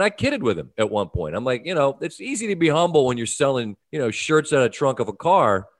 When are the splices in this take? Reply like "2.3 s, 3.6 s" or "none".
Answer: 3.8 s